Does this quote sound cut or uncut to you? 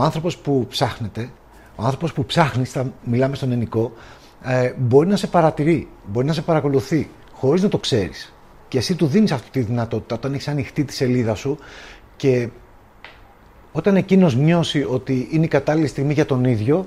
uncut